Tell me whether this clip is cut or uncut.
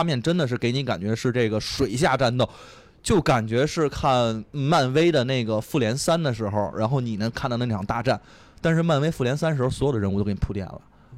uncut